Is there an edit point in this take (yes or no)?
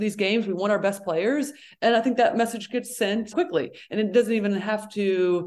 yes